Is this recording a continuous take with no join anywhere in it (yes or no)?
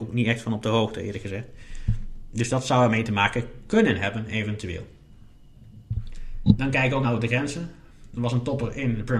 no